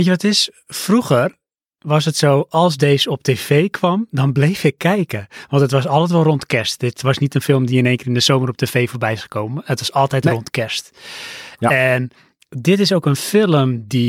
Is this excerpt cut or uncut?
uncut